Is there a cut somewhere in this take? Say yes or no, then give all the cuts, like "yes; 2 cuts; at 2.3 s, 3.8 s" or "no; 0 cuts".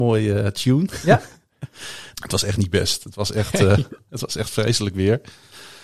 yes; 1 cut; at 2.1 s